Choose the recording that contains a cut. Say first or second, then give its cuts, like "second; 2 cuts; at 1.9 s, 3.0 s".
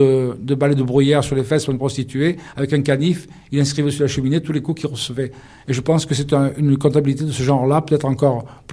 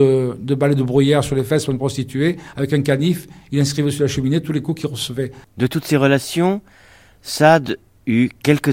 second; 1 cut; at 5.4 s